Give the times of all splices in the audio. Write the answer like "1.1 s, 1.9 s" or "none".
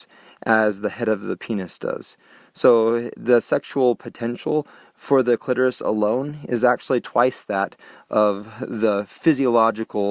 none